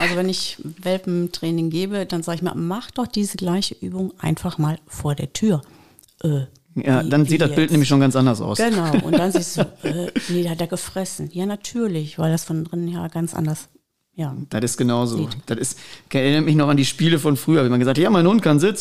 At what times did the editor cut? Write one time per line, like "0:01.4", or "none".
none